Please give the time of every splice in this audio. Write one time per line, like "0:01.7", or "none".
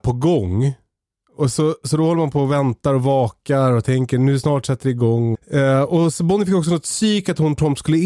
0:05.3

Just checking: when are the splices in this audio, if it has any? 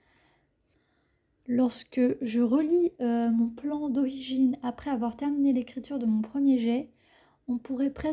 none

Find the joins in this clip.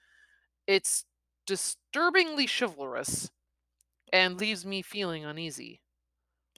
none

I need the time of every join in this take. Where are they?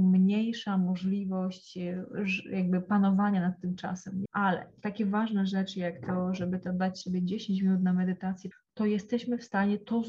0:04.3
0:08.5

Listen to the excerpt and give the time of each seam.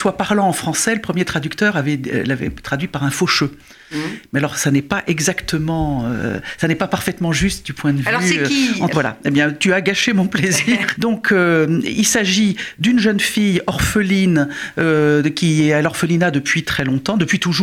0:08.9
0:11.0

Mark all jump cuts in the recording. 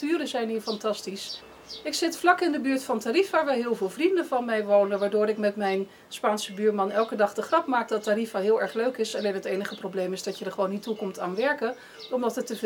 none

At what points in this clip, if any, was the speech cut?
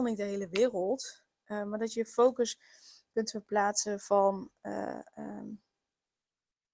none

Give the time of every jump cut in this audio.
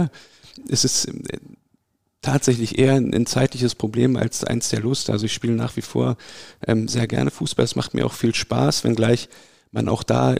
none

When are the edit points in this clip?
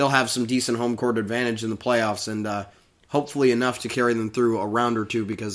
none

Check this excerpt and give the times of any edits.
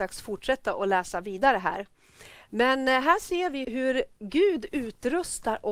0:03.6

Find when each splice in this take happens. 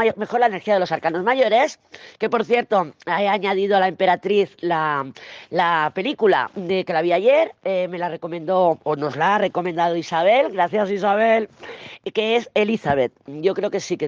none

